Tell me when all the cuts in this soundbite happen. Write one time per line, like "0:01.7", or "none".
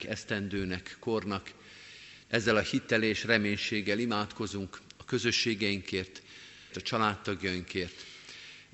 0:02.2
0:06.7